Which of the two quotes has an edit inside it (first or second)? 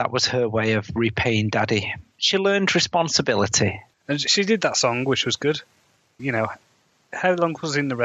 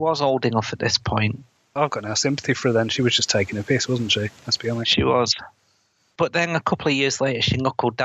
first